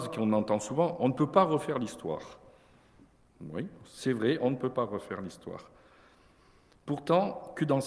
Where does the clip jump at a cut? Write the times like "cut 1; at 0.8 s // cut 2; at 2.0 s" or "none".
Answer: none